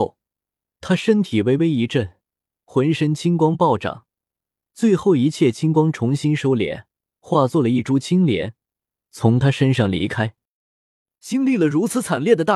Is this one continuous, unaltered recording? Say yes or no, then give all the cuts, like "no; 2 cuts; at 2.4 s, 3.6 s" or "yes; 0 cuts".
yes; 0 cuts